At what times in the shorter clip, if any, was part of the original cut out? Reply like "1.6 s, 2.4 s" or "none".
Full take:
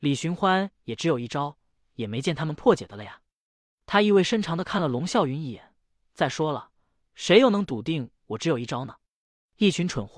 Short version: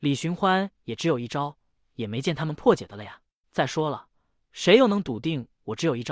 3.4 s